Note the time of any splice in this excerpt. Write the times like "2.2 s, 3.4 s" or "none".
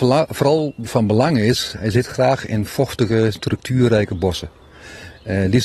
none